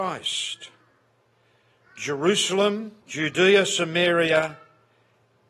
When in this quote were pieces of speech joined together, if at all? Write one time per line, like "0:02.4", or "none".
0:03.0